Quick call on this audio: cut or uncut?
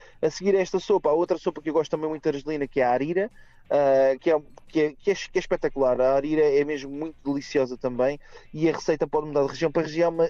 uncut